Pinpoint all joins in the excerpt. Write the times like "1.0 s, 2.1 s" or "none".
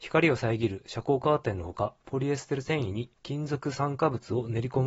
2.0 s, 3.1 s